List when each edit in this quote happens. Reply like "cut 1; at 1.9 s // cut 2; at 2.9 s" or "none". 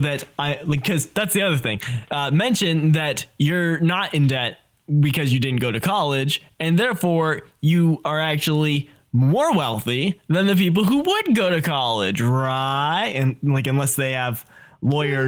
none